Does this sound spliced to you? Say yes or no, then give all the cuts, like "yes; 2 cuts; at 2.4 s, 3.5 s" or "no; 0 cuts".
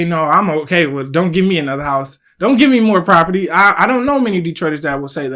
no; 0 cuts